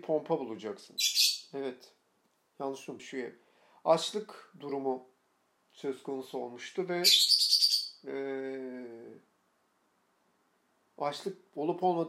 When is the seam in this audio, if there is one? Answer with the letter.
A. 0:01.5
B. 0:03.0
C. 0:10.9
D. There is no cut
B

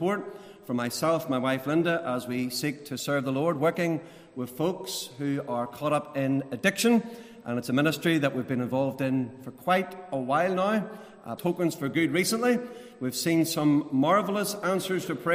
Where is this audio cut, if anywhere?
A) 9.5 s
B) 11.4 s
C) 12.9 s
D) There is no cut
B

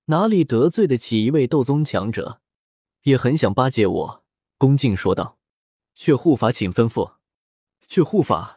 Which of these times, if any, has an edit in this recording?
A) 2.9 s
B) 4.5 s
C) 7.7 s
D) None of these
C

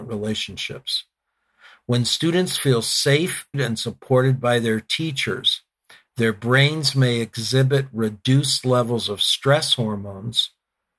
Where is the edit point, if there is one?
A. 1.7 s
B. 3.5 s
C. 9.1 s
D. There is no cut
B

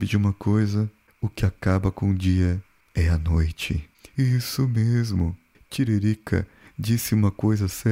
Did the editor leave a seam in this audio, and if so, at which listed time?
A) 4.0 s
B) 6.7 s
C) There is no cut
B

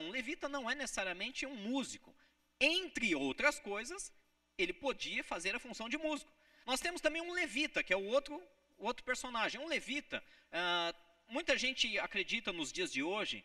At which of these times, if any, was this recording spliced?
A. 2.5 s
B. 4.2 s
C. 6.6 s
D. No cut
C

